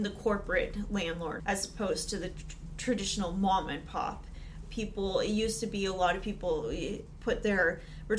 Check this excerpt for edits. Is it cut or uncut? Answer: cut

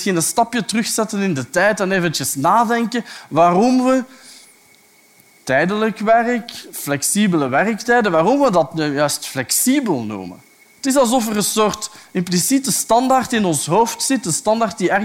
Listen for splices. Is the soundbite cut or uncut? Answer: uncut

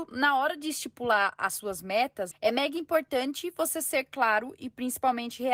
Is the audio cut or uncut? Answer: cut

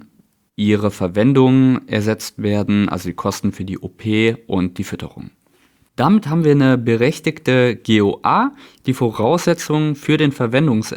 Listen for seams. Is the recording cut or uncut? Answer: cut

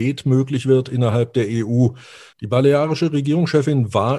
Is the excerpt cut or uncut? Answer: cut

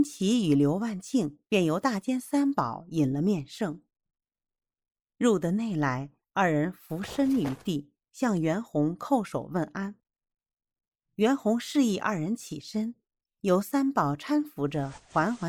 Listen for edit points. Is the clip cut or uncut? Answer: uncut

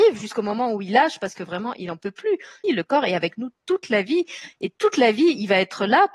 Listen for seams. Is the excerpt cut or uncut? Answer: cut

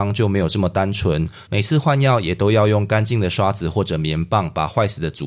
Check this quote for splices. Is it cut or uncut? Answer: cut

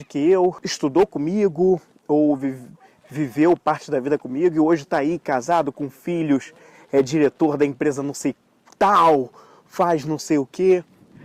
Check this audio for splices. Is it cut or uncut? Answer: uncut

